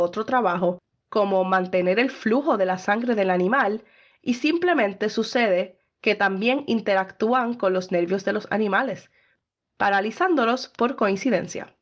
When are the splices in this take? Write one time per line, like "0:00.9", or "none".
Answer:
none